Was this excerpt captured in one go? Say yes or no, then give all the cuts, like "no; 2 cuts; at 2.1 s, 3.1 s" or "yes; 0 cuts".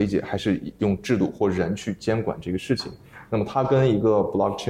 yes; 0 cuts